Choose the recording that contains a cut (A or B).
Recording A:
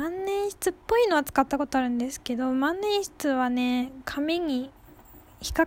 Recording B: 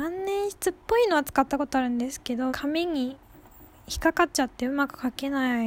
B